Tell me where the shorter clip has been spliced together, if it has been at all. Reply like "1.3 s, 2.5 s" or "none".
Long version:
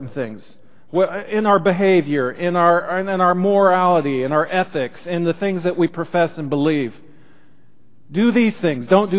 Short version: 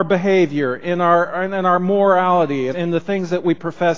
2.7 s